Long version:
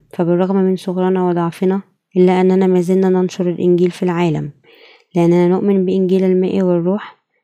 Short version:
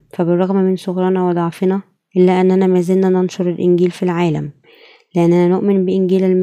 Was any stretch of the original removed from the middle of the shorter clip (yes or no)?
no